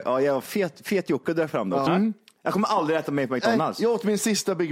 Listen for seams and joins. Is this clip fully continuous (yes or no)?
no